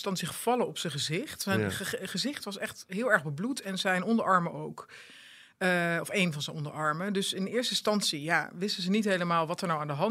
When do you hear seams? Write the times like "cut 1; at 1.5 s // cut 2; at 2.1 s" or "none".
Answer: none